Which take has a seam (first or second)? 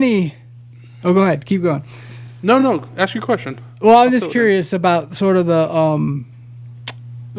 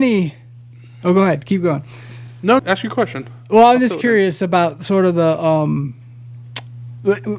second